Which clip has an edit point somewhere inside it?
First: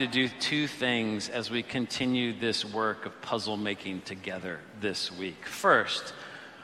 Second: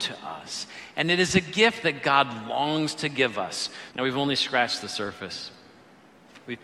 second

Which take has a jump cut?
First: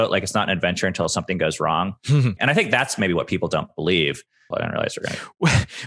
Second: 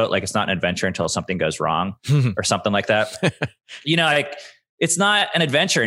first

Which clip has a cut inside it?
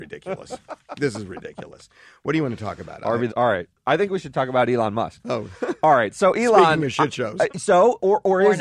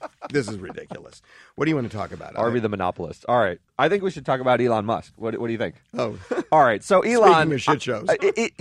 first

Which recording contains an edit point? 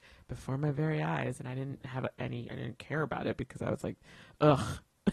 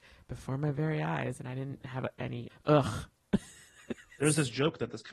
second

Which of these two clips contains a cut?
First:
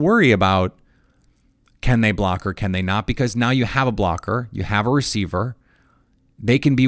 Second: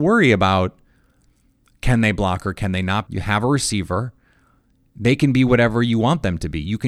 second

